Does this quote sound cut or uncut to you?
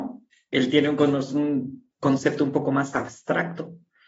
uncut